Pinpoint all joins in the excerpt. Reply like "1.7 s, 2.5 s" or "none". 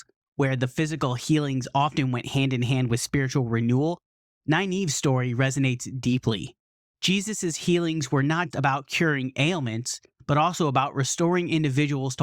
8.5 s